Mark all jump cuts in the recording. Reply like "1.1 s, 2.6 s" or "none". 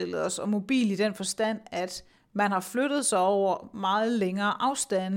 none